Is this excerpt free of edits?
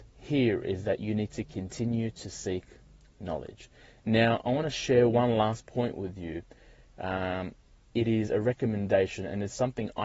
yes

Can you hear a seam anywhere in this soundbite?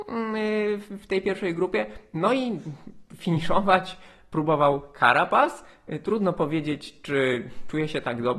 no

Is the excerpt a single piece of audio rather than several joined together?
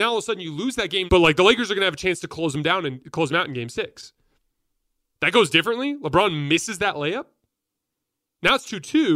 no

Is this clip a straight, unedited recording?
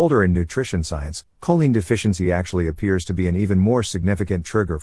yes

